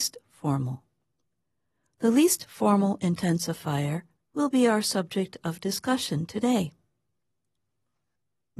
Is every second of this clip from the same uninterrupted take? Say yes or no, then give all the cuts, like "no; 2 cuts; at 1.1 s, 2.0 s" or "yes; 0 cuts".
no; 1 cut; at 4.2 s